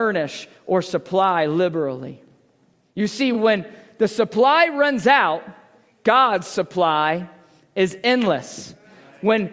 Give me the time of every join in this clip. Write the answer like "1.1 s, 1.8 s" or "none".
none